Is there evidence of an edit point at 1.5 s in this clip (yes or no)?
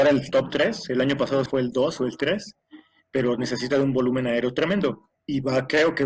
yes